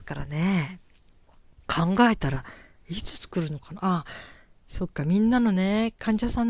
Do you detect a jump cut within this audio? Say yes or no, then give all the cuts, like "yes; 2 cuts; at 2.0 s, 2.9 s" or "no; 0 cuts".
no; 0 cuts